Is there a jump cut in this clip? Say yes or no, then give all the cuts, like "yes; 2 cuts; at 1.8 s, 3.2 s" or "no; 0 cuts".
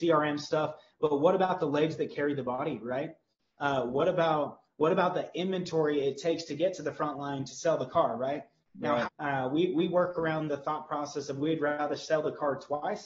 yes; 2 cuts; at 9.0 s, 10.5 s